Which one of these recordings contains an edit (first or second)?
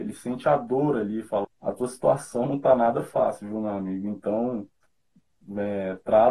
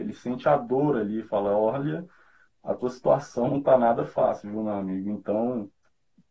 first